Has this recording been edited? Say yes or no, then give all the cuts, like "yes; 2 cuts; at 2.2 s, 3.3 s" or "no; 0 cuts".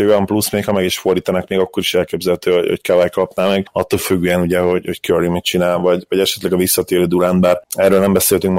no; 0 cuts